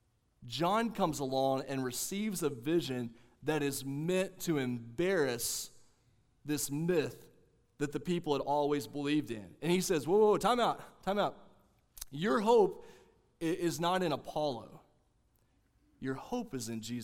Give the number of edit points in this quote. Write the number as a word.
zero